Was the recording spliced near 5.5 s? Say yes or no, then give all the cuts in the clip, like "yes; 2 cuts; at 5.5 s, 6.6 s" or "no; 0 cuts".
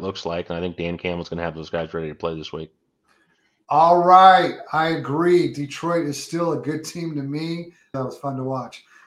no; 1 cut; at 7.9 s